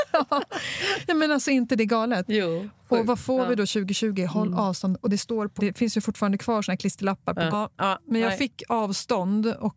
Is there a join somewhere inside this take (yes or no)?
yes